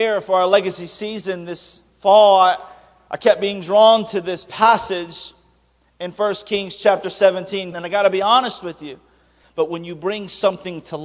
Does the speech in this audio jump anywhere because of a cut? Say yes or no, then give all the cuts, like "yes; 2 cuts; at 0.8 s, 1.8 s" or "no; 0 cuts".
yes; 2 cuts; at 7.7 s, 9.4 s